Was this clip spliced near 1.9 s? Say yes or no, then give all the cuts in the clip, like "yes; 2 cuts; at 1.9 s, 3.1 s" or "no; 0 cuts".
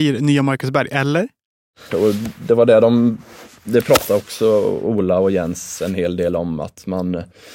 yes; 1 cut; at 1.9 s